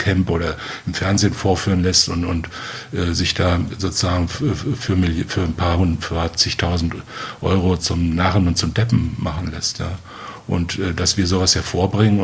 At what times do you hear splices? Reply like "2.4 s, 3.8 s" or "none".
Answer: 7.8 s

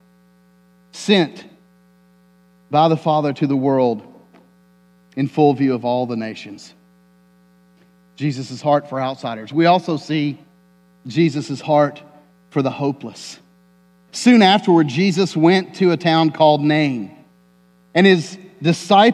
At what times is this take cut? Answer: 14.1 s

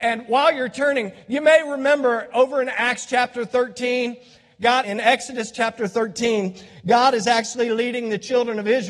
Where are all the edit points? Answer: 4.8 s

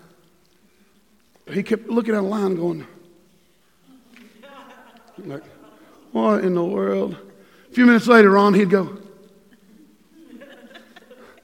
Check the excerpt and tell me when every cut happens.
1.5 s

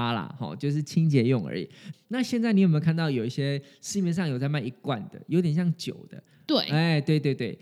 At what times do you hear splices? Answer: 1.9 s

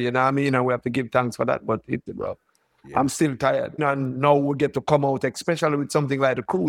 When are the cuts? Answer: 2.1 s, 3.8 s

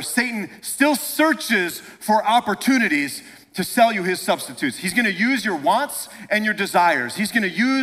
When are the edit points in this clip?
none

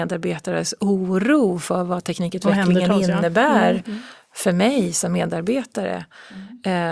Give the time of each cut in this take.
none

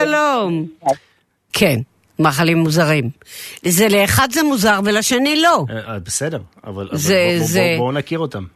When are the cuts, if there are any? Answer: 1.5 s

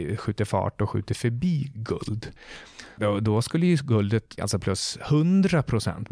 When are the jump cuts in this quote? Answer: 3.0 s, 4.4 s

